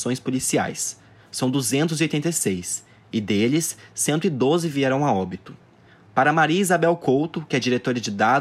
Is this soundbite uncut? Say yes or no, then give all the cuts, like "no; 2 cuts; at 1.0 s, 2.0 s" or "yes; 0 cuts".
yes; 0 cuts